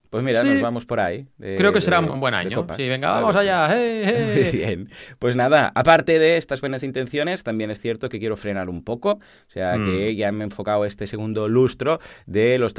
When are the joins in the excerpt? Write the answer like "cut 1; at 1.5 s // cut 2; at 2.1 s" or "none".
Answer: cut 1; at 2.1 s